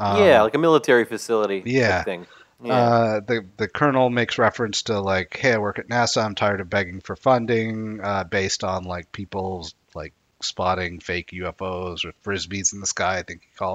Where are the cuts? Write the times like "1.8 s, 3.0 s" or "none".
none